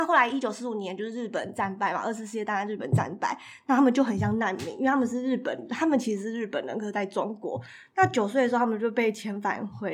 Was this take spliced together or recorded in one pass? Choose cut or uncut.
uncut